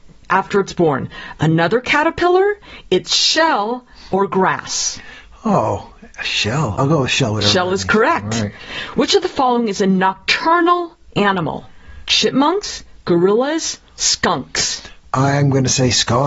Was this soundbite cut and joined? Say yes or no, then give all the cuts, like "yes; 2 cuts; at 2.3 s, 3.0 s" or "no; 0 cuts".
no; 0 cuts